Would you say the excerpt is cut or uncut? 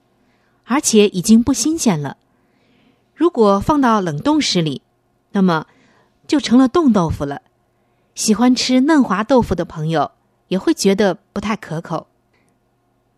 uncut